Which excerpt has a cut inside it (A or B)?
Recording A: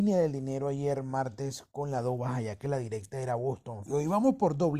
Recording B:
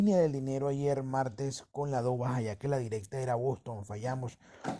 A